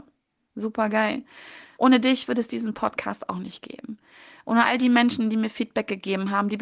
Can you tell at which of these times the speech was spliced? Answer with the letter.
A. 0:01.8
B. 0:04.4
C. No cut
A